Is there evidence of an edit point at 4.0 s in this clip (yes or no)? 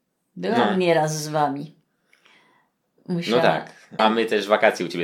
yes